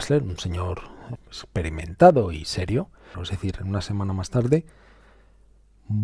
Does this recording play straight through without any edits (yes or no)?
no